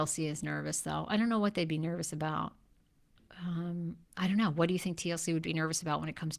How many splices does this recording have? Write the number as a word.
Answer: one